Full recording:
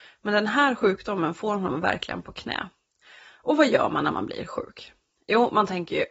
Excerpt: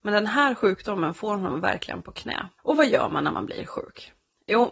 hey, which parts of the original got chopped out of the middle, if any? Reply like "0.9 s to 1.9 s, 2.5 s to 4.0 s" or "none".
2.8 s to 3.4 s